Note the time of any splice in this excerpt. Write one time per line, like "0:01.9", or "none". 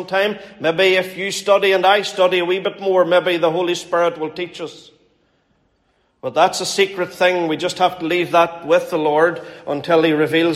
none